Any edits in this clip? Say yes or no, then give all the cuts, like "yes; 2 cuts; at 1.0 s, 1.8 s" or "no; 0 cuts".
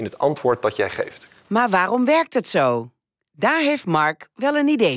no; 0 cuts